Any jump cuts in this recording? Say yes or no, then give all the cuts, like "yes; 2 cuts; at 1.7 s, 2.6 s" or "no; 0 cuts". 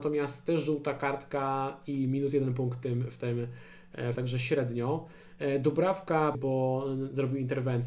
yes; 2 cuts; at 4.1 s, 6.3 s